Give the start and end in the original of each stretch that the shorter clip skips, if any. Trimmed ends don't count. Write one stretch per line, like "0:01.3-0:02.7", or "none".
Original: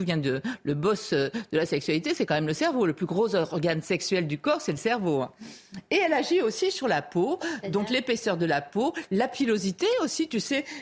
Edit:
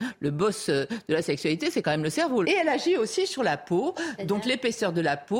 0:02.9-0:05.9